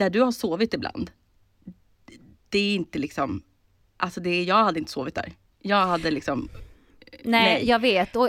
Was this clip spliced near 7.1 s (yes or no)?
no